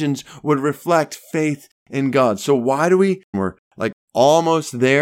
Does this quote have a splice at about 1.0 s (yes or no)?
no